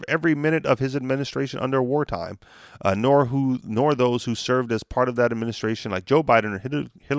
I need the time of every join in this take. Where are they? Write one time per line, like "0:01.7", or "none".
none